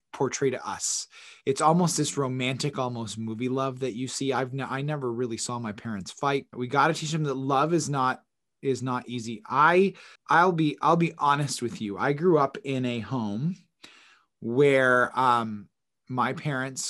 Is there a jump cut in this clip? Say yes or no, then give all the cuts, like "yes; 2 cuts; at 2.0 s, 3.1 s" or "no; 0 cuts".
yes; 2 cuts; at 6.5 s, 10.2 s